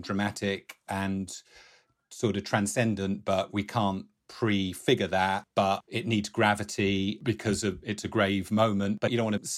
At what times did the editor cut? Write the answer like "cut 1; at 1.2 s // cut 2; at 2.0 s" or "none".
none